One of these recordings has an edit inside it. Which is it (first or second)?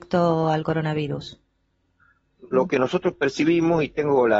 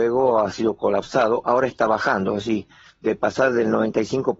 first